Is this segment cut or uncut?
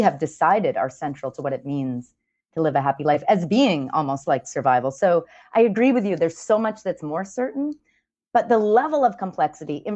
uncut